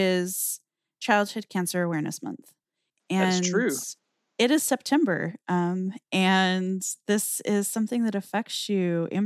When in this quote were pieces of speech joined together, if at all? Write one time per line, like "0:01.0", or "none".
none